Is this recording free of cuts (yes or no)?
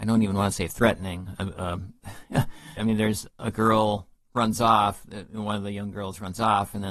no